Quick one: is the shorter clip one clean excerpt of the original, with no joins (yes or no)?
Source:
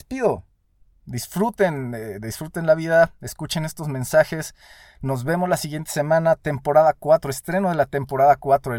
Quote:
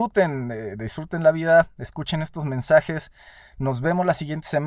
yes